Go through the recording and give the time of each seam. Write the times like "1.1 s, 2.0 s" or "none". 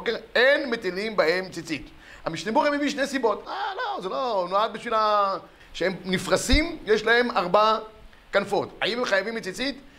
2.2 s, 3.4 s, 5.6 s